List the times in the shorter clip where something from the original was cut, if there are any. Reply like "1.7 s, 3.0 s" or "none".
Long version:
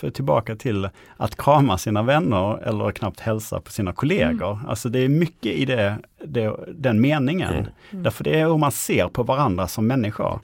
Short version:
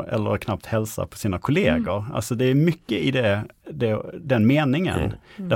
none